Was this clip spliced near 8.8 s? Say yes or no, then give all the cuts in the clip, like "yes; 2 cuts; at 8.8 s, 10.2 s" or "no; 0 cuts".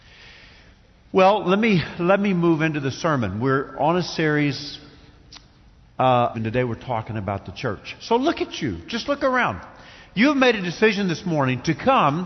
no; 1 cut; at 6.3 s